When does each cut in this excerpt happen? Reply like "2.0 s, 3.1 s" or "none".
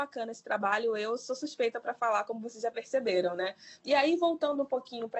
3.8 s